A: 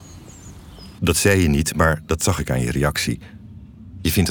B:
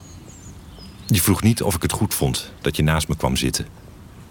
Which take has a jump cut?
A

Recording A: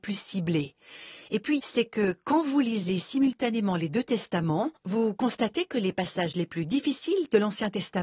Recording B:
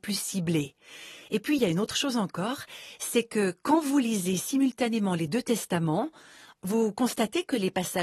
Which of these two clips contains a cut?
A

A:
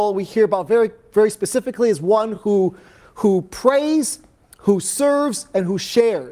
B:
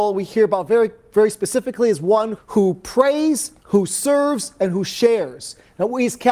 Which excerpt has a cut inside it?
B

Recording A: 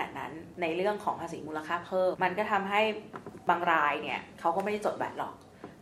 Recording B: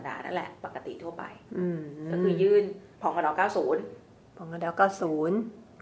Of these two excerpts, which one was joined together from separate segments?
A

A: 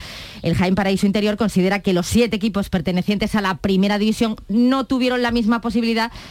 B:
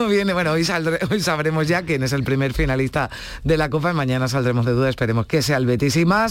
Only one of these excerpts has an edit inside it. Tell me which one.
B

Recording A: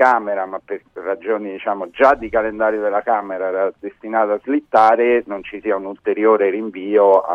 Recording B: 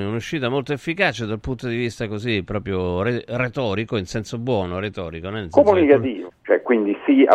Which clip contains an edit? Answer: B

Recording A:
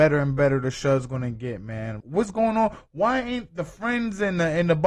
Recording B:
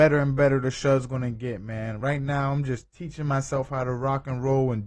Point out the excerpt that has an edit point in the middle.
A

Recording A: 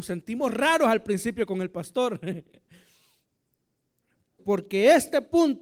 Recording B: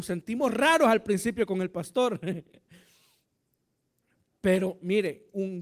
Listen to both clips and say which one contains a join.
A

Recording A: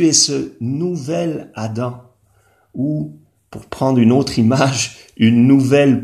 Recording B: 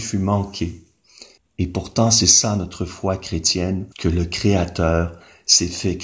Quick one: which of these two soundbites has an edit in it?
B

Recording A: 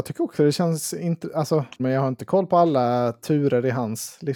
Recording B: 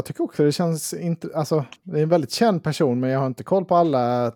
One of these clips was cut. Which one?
A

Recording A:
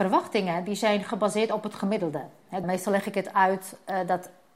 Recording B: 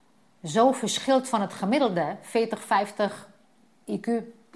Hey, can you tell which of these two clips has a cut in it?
A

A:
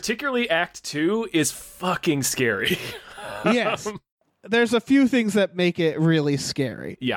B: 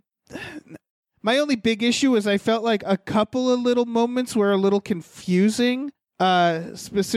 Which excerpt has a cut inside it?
A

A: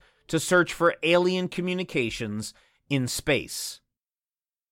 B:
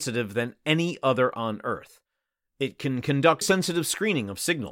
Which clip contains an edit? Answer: B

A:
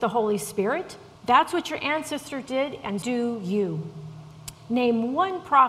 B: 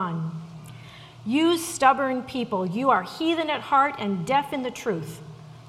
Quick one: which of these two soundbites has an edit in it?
A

